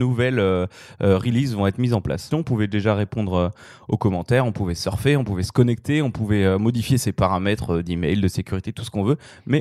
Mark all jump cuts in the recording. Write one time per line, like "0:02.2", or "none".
0:02.3